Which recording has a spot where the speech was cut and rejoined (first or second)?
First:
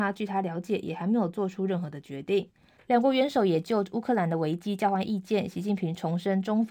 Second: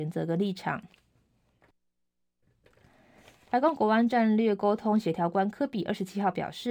first